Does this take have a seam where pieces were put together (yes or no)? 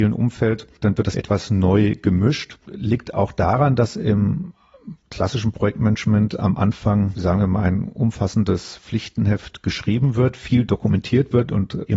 yes